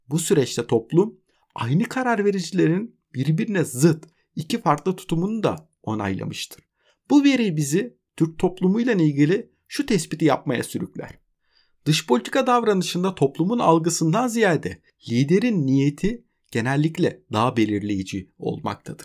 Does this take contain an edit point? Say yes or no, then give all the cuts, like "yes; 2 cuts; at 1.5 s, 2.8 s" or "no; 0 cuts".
no; 0 cuts